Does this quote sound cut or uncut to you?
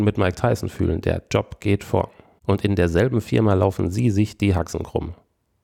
cut